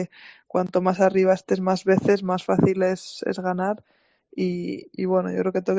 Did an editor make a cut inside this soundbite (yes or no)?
no